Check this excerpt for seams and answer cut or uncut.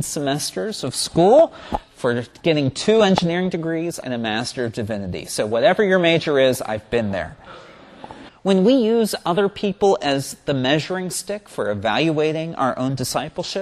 cut